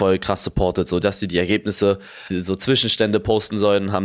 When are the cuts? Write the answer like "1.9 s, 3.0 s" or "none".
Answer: 1.0 s, 2.3 s